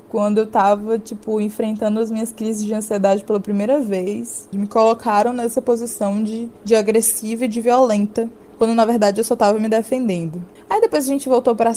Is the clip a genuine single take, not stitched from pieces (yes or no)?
no